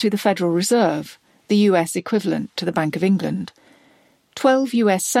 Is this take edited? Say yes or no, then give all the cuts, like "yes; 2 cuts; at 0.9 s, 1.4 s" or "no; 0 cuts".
no; 0 cuts